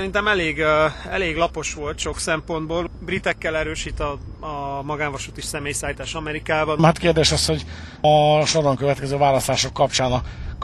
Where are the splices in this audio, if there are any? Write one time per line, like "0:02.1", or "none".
0:06.8